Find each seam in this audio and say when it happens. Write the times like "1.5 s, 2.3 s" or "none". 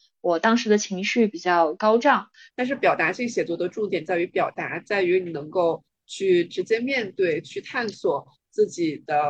2.5 s